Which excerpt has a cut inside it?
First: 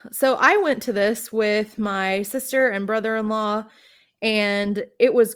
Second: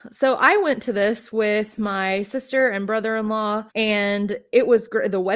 second; 1 cut; at 3.7 s

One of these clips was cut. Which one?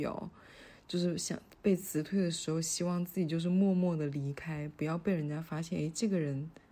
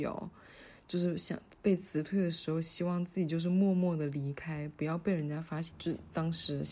second; 1 cut; at 5.7 s

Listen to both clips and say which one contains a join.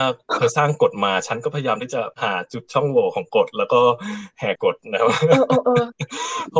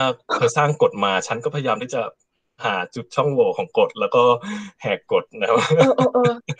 first; 2 cuts; at 2.1 s, 4.6 s

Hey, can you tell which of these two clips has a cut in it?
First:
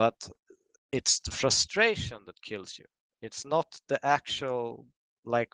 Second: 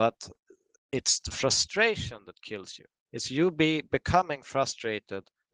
second; 1 cut; at 3.0 s

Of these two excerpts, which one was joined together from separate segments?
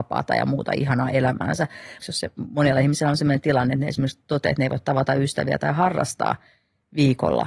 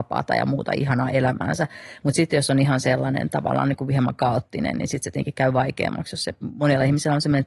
first; 1 cut; at 2.0 s

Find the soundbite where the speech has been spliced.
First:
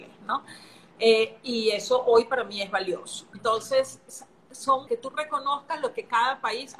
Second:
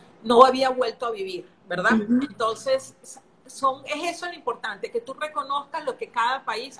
first; 2 cuts; at 3.3 s, 4.9 s

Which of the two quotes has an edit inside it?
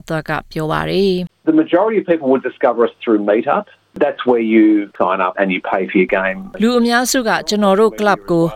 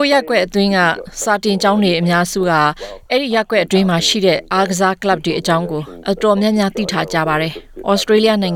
first; 2 cuts; at 3.8 s, 5.3 s

